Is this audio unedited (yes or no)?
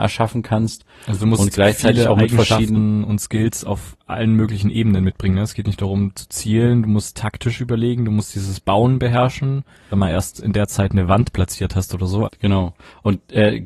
no